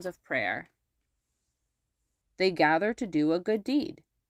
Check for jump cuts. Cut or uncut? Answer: cut